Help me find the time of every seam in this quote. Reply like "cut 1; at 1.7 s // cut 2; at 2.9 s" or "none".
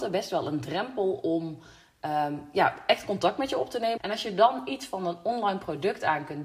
cut 1; at 4.0 s